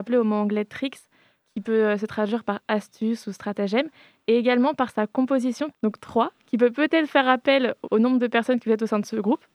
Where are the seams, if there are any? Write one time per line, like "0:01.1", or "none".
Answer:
0:05.7
0:07.8